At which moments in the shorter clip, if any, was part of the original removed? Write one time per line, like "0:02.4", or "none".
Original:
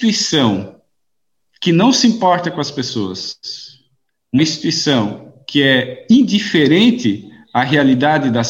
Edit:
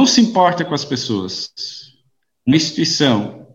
none